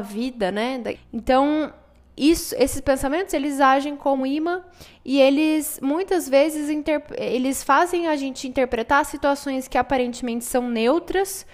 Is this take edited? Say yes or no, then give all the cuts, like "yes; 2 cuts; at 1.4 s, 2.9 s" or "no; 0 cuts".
yes; 2 cuts; at 0.9 s, 4.2 s